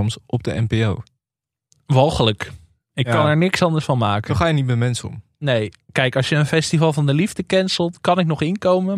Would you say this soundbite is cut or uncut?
uncut